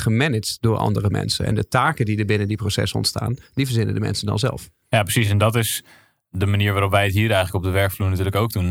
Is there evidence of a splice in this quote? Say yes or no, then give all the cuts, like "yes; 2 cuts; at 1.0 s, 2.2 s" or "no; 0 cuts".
no; 0 cuts